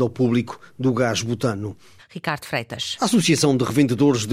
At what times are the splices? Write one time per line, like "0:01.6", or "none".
0:02.0